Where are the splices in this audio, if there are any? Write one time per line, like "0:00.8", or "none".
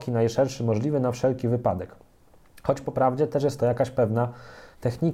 none